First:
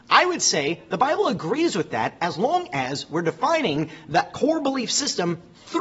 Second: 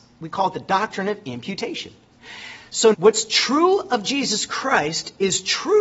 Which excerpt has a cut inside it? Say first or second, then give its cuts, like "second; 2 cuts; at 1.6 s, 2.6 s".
second; 1 cut; at 2.9 s